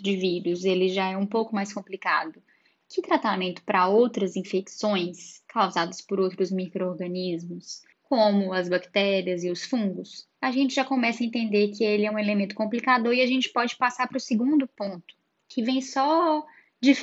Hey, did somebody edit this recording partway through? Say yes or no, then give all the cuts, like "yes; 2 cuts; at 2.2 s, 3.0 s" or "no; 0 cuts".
yes; 2 cuts; at 7.9 s, 10.3 s